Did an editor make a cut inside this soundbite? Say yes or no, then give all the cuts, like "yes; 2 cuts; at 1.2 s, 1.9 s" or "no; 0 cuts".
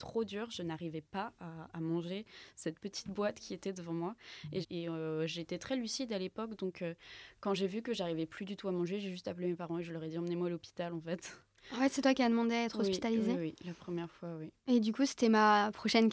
yes; 1 cut; at 4.6 s